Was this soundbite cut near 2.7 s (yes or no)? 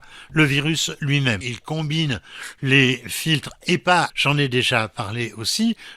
no